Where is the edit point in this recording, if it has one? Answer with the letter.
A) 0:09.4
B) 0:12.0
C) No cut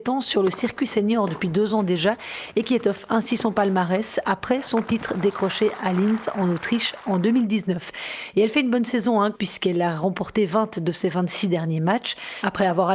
A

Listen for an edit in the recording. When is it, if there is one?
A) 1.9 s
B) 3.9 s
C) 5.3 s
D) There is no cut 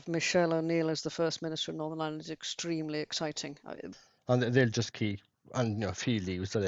B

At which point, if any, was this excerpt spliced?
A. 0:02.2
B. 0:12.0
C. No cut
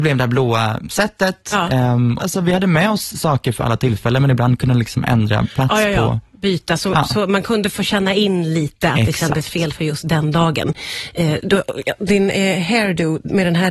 A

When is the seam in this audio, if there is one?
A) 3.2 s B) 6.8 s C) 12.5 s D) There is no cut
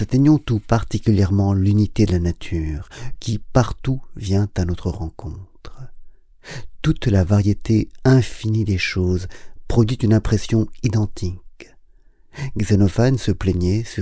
A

